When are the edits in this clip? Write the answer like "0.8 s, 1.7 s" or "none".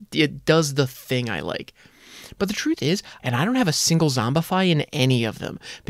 3.2 s